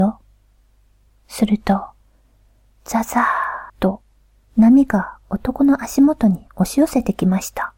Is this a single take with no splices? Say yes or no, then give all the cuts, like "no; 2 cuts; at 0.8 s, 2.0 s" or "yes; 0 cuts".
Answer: no; 2 cuts; at 1.1 s, 3.7 s